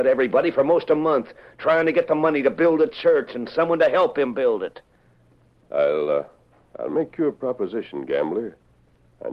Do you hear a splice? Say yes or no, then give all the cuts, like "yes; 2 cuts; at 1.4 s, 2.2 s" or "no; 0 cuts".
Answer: no; 0 cuts